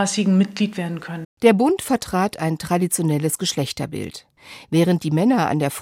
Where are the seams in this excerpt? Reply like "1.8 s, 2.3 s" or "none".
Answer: 1.2 s